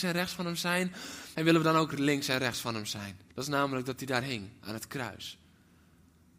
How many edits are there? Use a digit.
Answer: 2